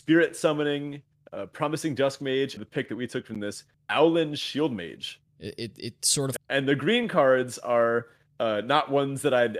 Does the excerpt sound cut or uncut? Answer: cut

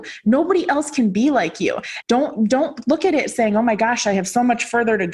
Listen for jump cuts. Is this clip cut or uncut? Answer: cut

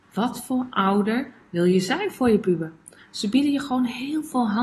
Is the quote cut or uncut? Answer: cut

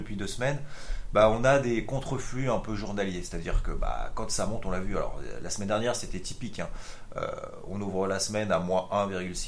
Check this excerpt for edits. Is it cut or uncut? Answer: uncut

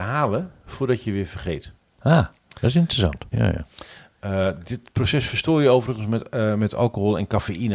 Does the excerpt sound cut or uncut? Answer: cut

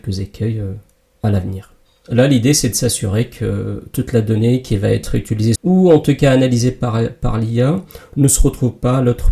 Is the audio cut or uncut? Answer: cut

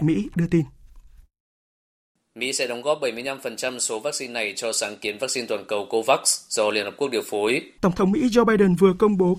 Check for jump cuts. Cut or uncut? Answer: cut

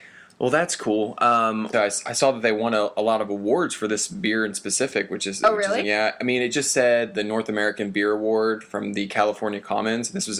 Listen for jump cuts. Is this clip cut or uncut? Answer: cut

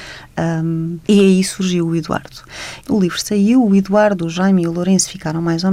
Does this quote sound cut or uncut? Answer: cut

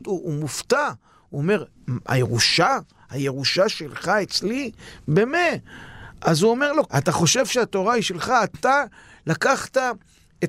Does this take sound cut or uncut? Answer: cut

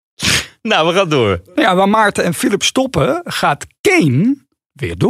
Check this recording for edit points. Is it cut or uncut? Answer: uncut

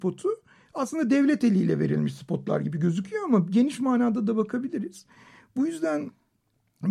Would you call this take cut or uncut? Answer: uncut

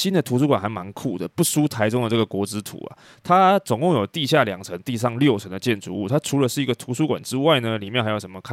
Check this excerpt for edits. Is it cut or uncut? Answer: uncut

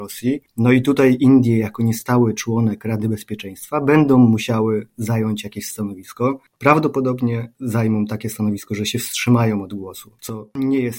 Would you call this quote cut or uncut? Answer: uncut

